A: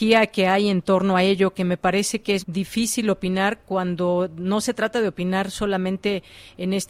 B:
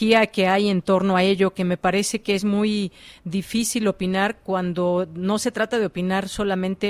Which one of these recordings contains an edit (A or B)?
A